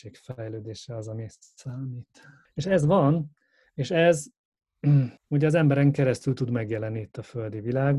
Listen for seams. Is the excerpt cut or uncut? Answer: cut